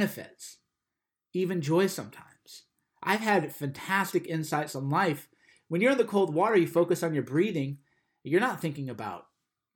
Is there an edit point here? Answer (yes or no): no